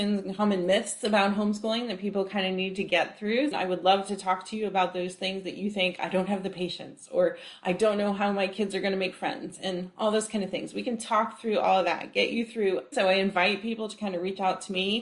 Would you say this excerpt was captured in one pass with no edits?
no; 2 cuts; at 3.5 s, 12.9 s

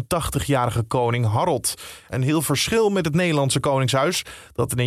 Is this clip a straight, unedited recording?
no; 1 cut; at 2.1 s

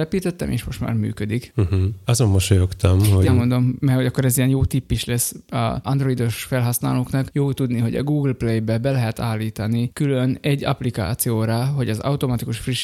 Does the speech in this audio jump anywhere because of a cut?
yes; 1 cut; at 3.3 s

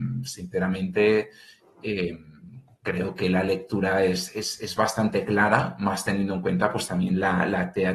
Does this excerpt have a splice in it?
no; 0 cuts

